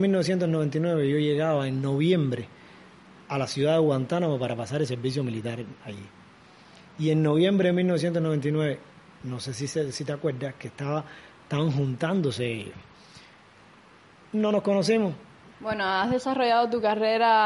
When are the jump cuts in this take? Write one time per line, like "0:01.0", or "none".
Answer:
0:15.5